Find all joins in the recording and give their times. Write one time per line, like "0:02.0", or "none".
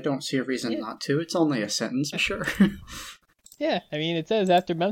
0:02.1